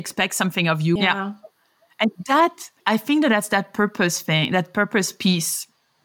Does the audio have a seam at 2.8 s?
yes; 2 cuts; at 1.0 s, 2.8 s

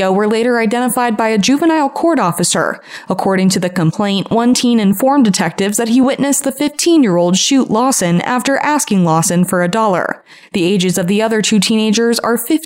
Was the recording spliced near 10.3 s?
no; 0 cuts

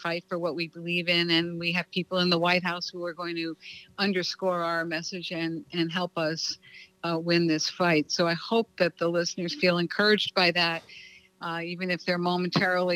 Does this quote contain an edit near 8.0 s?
no; 0 cuts

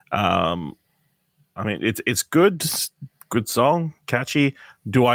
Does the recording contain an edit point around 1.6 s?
yes; 1 cut; at 1.6 s

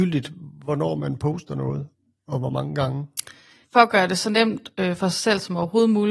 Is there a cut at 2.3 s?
no; 1 cut; at 3.6 s

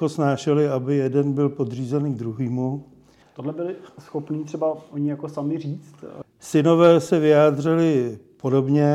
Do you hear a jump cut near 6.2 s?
yes; 2 cuts; at 3.2 s, 6.2 s

